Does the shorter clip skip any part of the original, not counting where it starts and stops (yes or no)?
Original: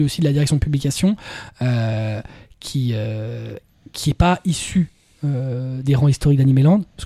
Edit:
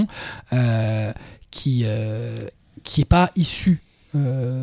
no